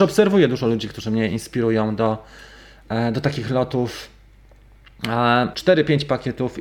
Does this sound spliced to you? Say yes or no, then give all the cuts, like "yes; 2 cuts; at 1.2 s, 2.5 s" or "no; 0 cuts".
yes; 1 cut; at 5.5 s